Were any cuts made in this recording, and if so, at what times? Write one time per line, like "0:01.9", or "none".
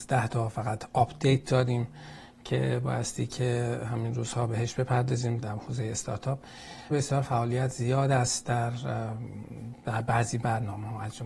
0:05.4
0:06.9